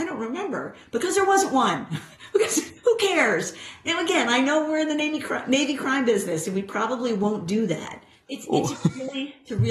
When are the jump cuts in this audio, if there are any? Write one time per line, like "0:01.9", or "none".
0:08.3